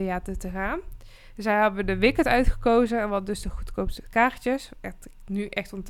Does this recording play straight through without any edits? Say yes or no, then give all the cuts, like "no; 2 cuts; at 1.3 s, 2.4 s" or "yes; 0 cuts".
yes; 0 cuts